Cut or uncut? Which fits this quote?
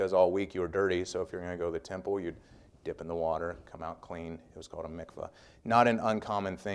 uncut